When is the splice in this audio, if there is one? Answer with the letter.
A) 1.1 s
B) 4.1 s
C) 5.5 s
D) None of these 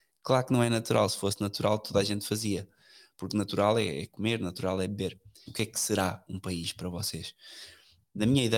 C